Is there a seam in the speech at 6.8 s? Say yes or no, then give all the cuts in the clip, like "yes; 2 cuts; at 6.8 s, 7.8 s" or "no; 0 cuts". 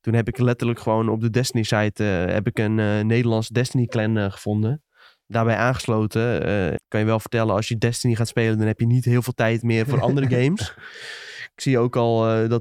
yes; 1 cut; at 6.8 s